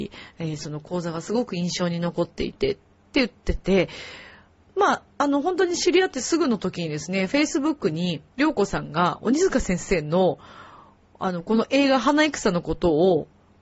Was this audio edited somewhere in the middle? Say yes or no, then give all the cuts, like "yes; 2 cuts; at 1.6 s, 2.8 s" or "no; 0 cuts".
yes; 1 cut; at 8.3 s